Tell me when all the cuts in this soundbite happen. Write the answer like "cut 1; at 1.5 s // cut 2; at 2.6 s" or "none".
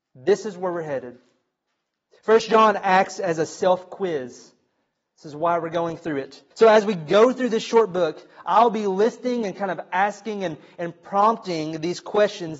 cut 1; at 6.5 s